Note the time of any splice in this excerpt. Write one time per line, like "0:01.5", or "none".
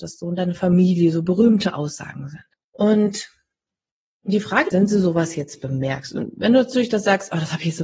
0:02.5
0:04.7